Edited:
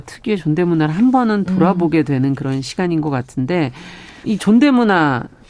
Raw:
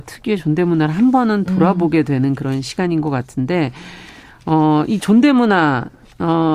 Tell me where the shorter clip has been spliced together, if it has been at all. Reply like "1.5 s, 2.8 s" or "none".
4.2 s